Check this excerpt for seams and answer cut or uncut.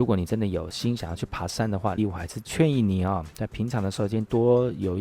cut